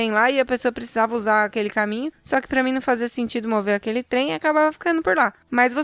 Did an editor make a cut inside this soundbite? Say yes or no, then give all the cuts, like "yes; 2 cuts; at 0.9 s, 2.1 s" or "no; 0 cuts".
no; 0 cuts